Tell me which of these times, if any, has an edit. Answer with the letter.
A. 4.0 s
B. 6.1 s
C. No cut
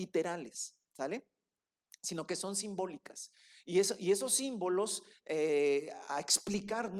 B